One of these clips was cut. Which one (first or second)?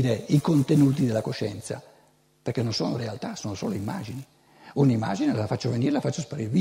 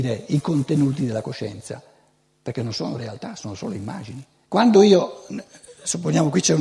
second